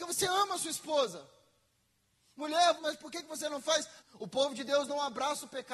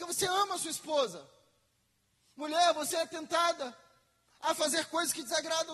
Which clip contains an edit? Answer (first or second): first